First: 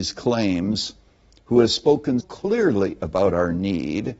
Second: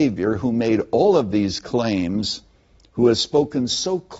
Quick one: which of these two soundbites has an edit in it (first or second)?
first